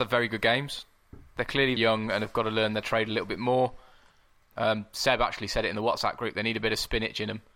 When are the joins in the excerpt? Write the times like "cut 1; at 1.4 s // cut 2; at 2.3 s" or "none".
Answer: cut 1; at 1.8 s // cut 2; at 4.5 s